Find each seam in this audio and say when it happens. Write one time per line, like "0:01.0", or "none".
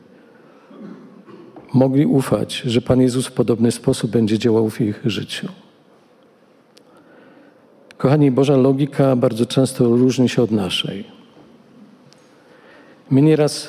none